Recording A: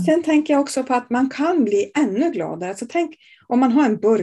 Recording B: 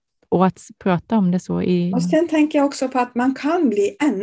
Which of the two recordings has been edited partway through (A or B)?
B